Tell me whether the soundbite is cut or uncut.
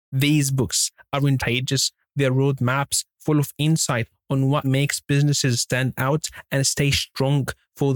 cut